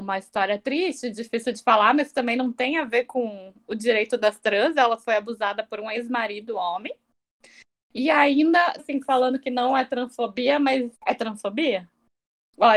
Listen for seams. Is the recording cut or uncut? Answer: cut